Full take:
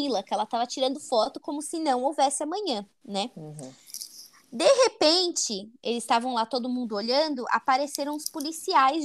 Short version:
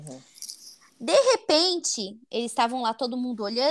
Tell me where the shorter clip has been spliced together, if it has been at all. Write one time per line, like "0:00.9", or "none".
none